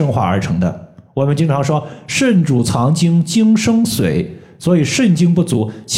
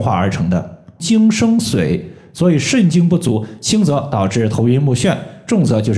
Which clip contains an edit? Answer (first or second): second